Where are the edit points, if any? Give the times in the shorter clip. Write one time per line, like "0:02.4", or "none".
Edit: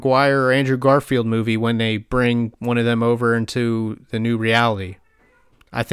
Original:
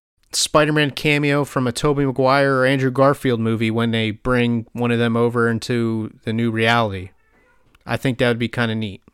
none